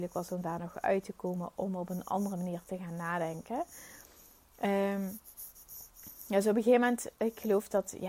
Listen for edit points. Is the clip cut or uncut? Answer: uncut